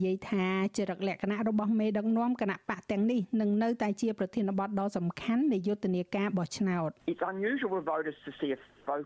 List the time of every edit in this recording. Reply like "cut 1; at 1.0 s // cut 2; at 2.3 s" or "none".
cut 1; at 7.0 s